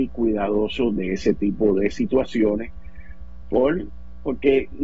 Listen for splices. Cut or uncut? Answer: uncut